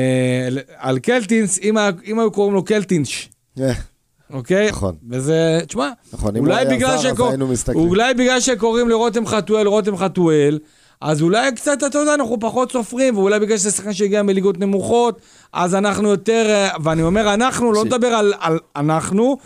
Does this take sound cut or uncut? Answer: cut